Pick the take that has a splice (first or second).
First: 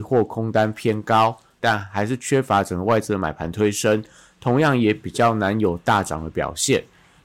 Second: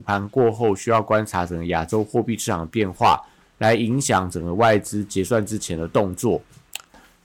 first